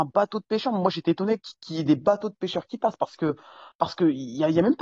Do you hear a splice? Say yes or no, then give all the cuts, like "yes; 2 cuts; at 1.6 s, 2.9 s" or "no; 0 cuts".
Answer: no; 0 cuts